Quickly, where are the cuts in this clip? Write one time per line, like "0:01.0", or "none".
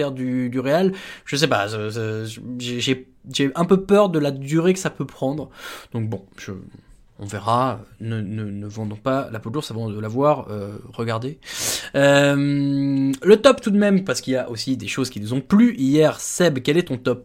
none